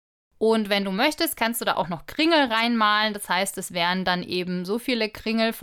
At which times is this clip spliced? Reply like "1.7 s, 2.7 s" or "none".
none